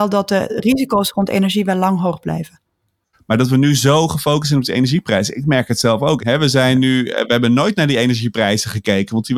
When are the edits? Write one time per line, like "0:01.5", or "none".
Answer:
0:03.1
0:06.2